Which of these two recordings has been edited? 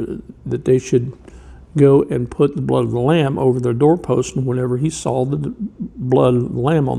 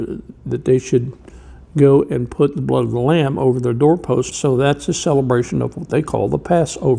second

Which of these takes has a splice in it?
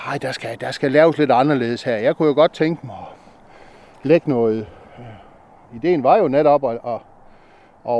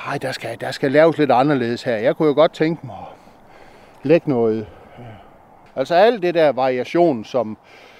second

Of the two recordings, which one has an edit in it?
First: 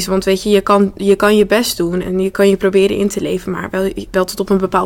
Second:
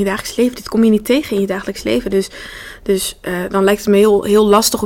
first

